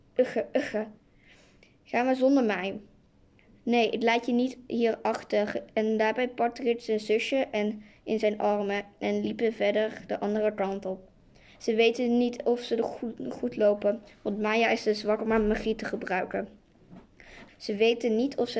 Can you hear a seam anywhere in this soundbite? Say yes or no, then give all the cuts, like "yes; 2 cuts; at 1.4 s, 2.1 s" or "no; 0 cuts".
yes; 1 cut; at 17.5 s